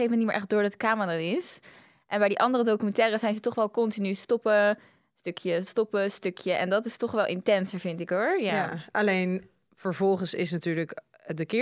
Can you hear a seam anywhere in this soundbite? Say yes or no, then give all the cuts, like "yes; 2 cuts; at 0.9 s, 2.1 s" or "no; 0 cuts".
no; 0 cuts